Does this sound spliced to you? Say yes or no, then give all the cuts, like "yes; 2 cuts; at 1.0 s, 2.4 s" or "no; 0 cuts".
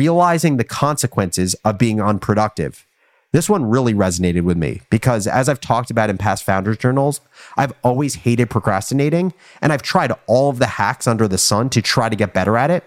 no; 0 cuts